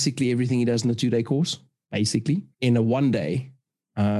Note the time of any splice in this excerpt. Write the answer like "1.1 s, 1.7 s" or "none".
2.5 s